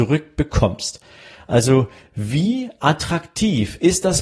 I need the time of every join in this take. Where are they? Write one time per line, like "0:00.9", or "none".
none